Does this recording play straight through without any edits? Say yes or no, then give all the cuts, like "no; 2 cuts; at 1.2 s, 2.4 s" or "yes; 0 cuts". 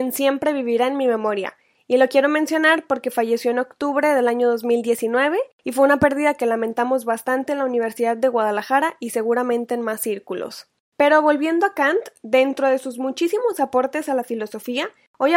yes; 0 cuts